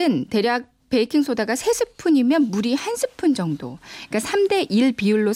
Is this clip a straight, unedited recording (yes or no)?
yes